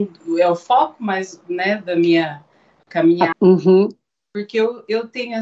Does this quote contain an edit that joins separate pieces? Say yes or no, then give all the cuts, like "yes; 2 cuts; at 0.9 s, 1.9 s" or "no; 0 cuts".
yes; 1 cut; at 3.3 s